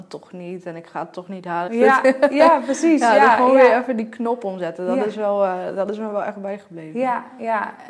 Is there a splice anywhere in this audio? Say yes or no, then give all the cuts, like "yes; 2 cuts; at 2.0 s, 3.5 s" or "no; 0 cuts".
yes; 1 cut; at 1.7 s